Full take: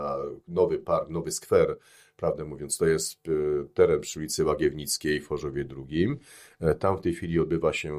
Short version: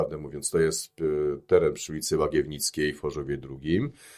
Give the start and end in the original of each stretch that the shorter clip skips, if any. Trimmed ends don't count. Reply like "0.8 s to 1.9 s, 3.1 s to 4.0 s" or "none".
none